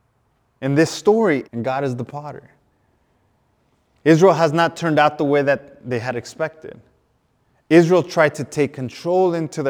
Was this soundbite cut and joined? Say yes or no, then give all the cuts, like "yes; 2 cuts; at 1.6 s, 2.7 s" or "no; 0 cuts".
yes; 1 cut; at 1.4 s